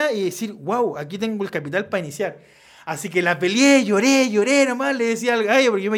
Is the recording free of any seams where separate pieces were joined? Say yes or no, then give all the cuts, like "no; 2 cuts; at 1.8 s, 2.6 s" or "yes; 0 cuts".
yes; 0 cuts